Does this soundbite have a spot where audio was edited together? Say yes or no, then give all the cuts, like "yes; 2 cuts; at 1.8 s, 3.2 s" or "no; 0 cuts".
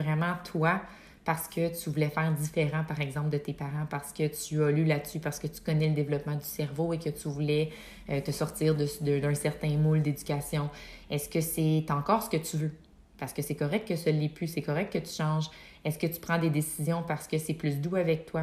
no; 0 cuts